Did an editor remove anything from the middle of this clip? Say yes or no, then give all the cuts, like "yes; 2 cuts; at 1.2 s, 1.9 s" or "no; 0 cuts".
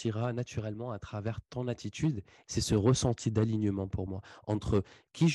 yes; 1 cut; at 2.5 s